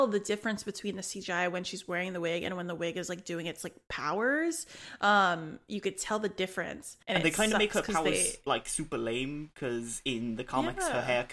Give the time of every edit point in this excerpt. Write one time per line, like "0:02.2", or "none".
0:07.0